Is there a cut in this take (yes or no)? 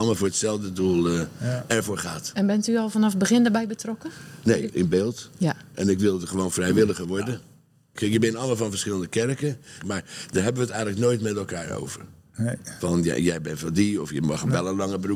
yes